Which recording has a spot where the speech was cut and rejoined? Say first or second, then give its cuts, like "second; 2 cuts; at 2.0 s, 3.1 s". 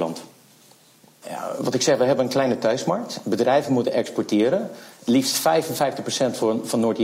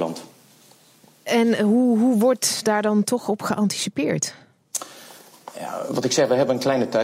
first; 1 cut; at 1.2 s